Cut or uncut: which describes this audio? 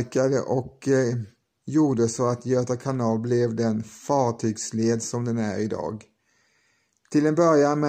uncut